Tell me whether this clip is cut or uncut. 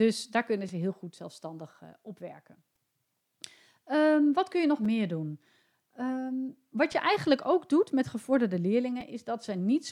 uncut